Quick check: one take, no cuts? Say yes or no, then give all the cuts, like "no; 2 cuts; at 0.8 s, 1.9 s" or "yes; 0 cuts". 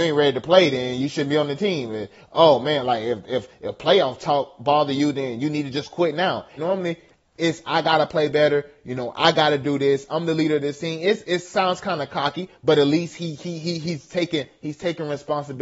no; 1 cut; at 6.6 s